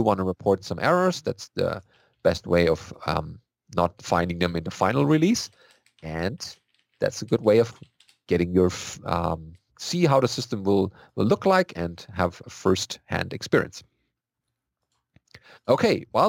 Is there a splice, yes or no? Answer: yes